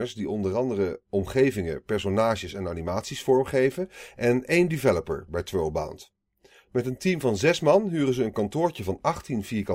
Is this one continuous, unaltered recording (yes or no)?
yes